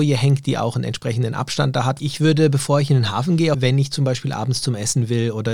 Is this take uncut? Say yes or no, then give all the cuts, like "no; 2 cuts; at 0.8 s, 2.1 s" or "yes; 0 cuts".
no; 2 cuts; at 2.0 s, 3.5 s